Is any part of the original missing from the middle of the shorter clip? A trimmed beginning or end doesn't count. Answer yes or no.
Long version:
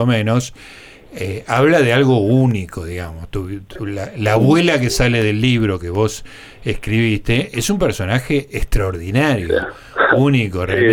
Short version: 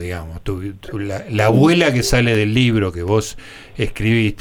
no